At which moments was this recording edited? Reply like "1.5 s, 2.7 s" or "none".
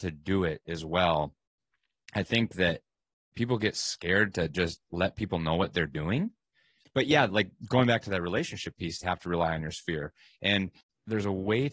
6.8 s, 9.0 s